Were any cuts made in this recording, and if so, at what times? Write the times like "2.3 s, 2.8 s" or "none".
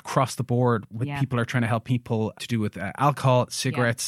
2.3 s